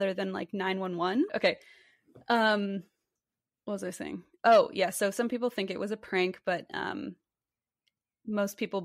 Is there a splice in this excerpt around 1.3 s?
yes; 1 cut; at 1.3 s

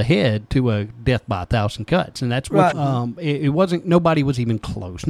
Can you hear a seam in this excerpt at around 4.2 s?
no; 1 cut; at 2.7 s

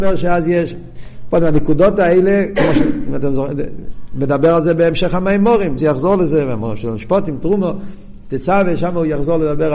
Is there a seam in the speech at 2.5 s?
no; 1 cut; at 5.8 s

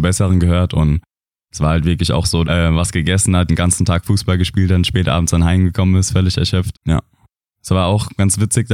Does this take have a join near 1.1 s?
no; 3 cuts; at 2.4 s, 3.5 s, 6.7 s

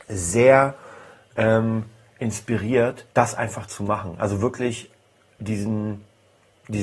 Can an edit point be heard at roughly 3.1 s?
yes; 1 cut; at 3.1 s

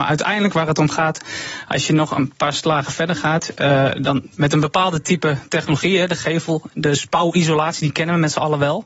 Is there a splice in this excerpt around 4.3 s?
yes; 1 cut; at 4.3 s

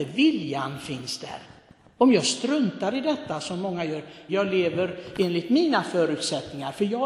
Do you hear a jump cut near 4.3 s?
yes; 1 cut; at 4.3 s

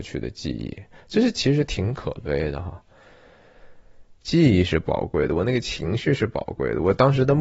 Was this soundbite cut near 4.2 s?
yes; 1 cut; at 4.2 s

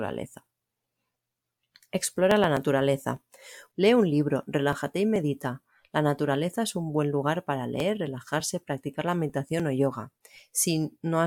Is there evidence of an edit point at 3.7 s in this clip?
yes; 1 cut; at 3.7 s

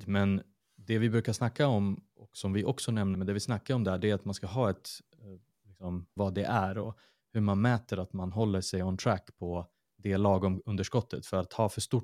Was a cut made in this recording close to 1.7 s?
no; 2 cuts; at 3.1 s, 6.2 s

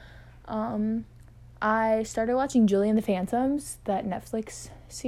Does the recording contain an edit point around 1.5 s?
no; 0 cuts

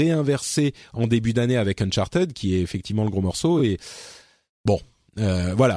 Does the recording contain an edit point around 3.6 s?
no; 0 cuts

